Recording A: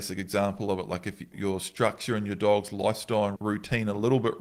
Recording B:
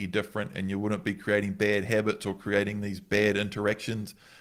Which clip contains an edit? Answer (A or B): A